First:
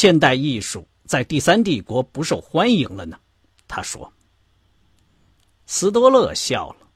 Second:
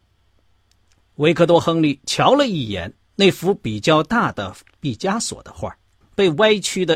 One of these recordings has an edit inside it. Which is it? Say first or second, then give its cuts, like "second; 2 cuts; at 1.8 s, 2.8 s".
second; 1 cut; at 6.0 s